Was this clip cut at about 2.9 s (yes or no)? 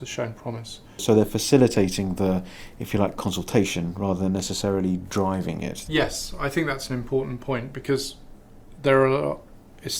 no